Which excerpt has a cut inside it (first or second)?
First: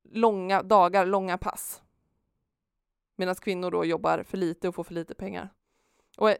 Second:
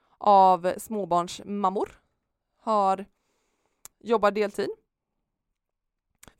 second